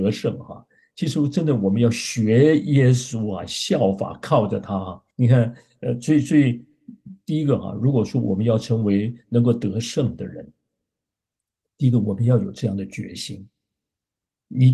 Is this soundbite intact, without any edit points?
no; 1 cut; at 5.1 s

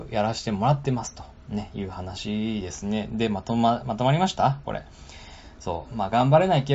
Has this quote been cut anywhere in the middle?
no; 0 cuts

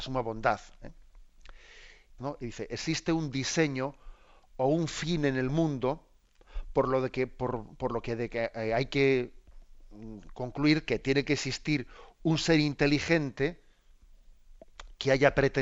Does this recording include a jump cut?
yes; 1 cut; at 2.2 s

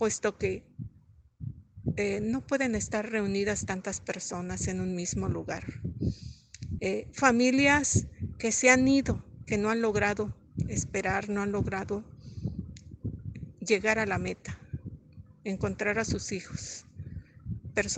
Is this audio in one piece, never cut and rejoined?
no; 2 cuts; at 6.8 s, 9.4 s

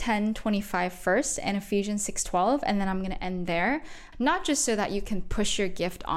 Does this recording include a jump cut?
yes; 1 cut; at 4.1 s

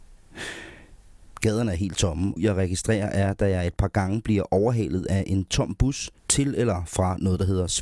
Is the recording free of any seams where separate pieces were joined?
no; 2 cuts; at 2.4 s, 6.2 s

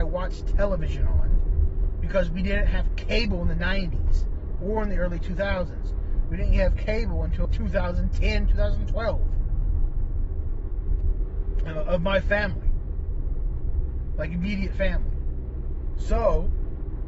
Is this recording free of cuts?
no; 1 cut; at 7.5 s

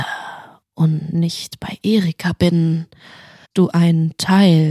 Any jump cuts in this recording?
yes; 1 cut; at 3.4 s

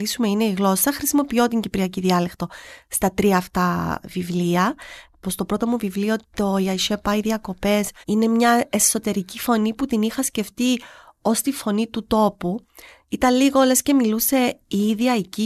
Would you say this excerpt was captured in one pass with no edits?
no; 2 cuts; at 5.2 s, 8.0 s

